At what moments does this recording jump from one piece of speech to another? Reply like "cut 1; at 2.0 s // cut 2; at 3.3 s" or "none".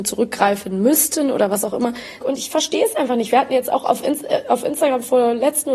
cut 1; at 2.2 s